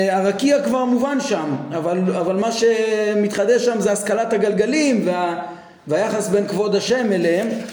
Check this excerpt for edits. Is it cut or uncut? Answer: uncut